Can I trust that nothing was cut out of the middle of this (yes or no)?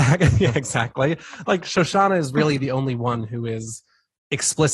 yes